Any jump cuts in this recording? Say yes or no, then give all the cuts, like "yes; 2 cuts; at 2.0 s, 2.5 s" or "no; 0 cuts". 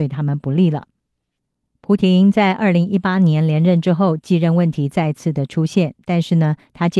no; 0 cuts